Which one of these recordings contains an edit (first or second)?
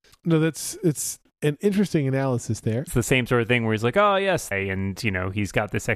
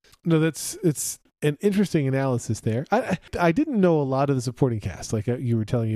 first